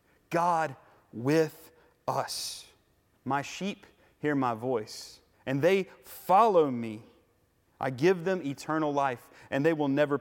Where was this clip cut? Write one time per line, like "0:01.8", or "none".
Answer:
0:03.1
0:05.3